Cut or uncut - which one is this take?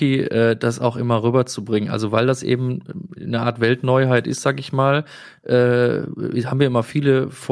uncut